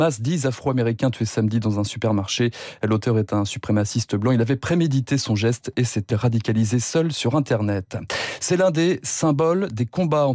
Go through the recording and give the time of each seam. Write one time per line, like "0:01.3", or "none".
0:06.1